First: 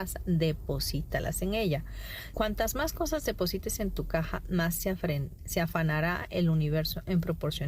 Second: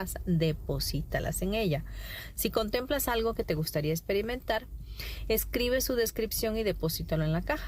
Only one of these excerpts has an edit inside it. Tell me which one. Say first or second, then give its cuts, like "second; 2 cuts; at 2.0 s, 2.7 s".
first; 1 cut; at 2.3 s